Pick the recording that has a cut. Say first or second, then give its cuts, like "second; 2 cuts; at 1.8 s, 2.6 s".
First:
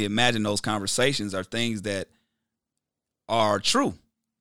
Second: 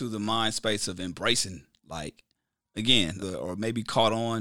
second; 1 cut; at 3.2 s